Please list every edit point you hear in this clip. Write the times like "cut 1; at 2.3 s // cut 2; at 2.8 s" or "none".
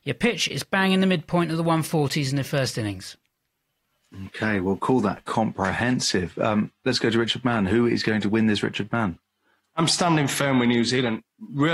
none